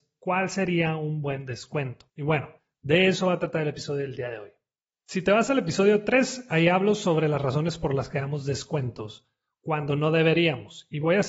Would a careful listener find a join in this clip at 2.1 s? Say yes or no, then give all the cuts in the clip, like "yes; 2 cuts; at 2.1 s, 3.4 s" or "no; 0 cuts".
yes; 1 cut; at 2.1 s